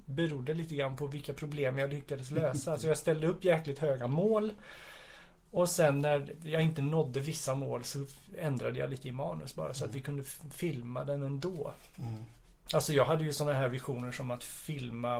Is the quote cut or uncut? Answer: uncut